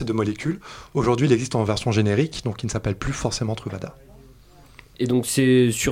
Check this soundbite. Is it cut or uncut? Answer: uncut